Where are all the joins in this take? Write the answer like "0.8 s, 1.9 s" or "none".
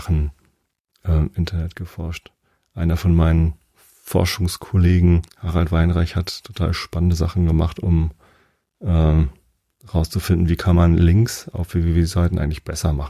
5.3 s